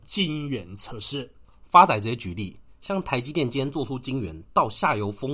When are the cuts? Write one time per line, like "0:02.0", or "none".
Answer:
none